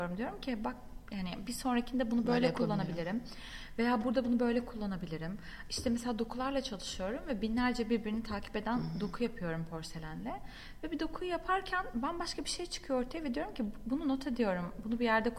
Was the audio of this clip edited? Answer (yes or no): no